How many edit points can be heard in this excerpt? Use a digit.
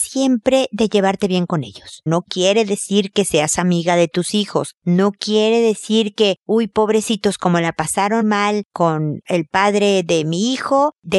2